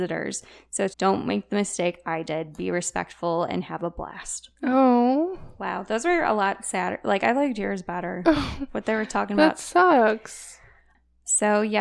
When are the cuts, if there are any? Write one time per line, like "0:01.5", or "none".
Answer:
0:00.9
0:04.6